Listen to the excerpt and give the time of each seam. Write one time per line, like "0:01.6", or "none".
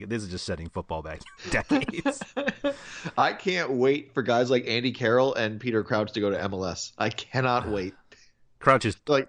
none